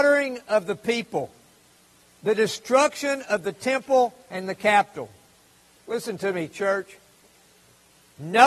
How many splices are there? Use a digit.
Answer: 1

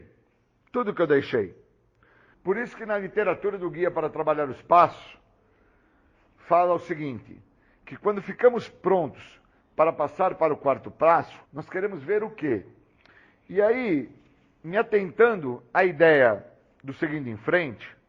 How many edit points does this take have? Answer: 2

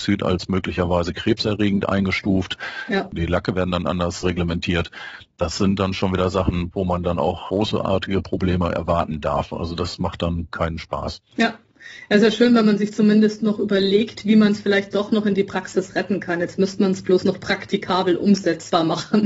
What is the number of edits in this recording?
1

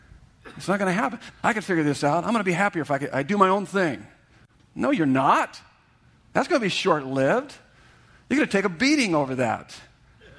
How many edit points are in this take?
1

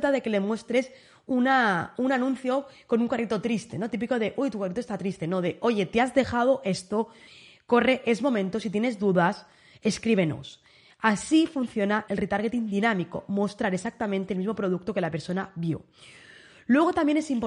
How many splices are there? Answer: 1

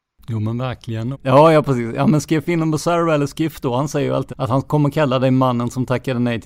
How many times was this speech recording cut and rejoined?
2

